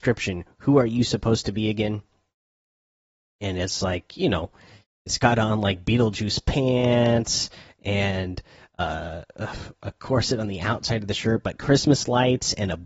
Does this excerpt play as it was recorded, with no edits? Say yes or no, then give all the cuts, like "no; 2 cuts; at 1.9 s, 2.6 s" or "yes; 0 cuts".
yes; 0 cuts